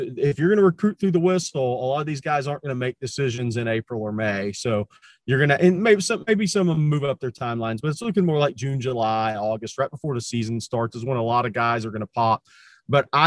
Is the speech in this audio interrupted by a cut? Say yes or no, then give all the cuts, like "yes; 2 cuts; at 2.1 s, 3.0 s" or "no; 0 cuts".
no; 0 cuts